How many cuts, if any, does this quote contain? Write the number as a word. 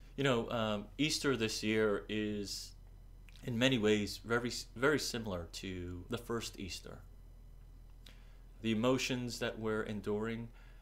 two